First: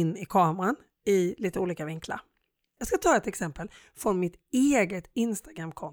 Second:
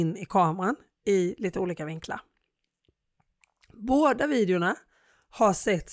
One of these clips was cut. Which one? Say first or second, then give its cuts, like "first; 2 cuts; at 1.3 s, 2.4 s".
first; 1 cut; at 2.8 s